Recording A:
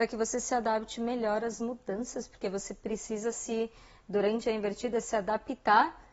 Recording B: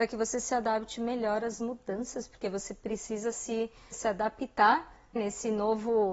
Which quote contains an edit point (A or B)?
B